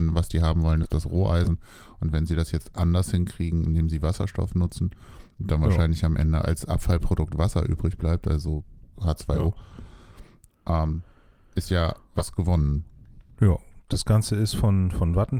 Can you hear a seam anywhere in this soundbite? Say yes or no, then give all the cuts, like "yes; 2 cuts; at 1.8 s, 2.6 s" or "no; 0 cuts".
no; 0 cuts